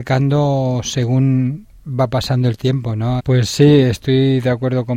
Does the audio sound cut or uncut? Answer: cut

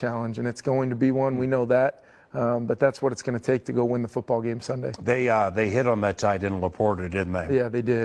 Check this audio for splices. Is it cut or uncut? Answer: uncut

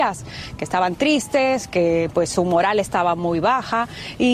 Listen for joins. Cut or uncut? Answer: uncut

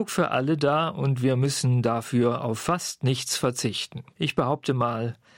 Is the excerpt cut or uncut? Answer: cut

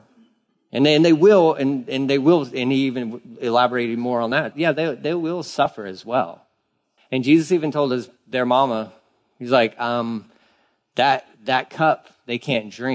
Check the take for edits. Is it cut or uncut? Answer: cut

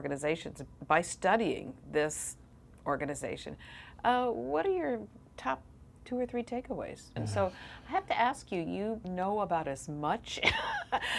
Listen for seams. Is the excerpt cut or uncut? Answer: cut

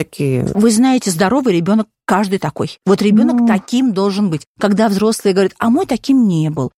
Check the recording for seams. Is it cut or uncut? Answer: uncut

